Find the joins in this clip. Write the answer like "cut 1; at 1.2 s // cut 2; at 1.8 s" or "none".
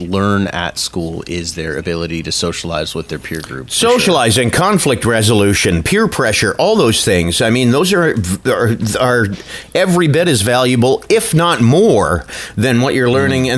none